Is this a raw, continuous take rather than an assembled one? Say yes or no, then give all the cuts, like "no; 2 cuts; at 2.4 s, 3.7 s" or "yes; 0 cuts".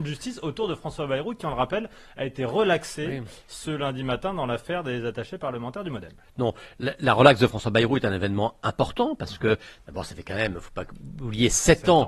yes; 0 cuts